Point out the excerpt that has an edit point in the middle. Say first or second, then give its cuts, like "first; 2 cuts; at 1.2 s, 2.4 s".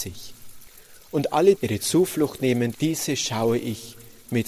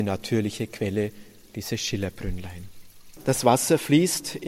first; 2 cuts; at 1.6 s, 2.7 s